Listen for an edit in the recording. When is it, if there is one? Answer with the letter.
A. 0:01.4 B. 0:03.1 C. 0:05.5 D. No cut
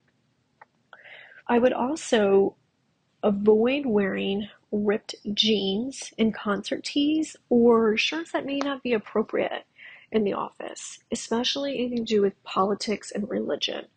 A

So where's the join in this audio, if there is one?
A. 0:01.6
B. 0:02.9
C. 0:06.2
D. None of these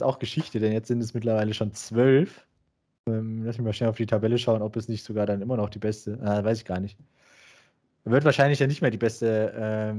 D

